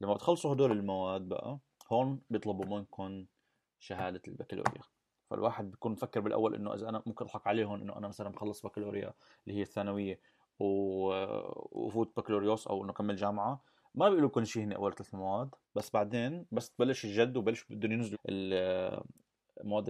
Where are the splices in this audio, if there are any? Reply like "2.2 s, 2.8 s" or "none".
15.6 s, 18.1 s